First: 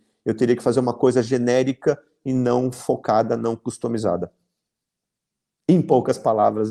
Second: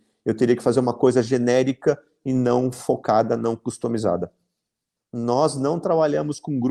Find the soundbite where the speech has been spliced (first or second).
second